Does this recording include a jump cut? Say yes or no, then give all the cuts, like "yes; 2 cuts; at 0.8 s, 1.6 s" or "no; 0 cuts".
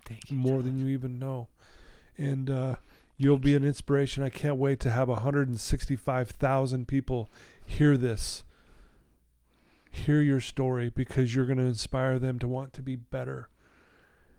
no; 0 cuts